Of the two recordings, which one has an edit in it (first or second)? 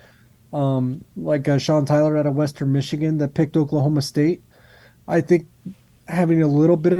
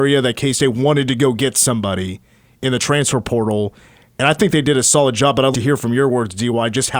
second